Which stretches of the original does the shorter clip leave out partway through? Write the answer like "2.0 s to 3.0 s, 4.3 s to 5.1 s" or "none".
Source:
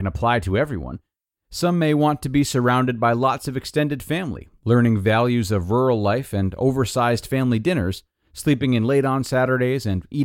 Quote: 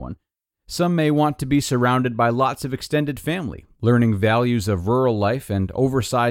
none